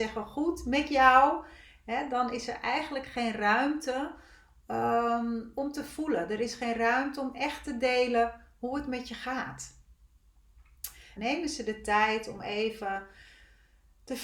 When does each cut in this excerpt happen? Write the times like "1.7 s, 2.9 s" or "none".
11.2 s